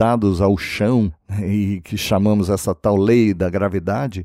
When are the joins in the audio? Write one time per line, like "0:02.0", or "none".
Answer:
none